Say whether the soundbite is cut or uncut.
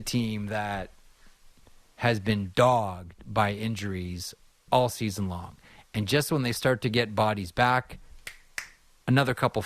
uncut